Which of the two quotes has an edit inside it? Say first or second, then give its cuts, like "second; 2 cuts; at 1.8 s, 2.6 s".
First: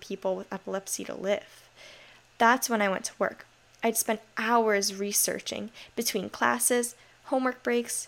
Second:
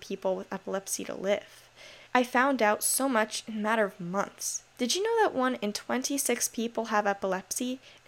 second; 2 cuts; at 2.1 s, 4.7 s